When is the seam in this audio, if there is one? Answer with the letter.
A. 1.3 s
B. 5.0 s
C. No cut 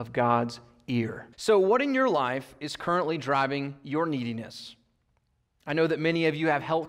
A